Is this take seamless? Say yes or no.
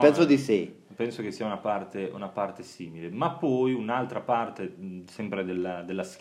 yes